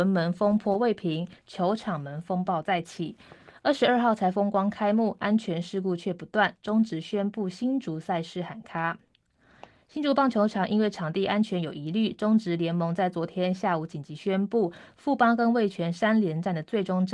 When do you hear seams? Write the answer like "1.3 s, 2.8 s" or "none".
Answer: none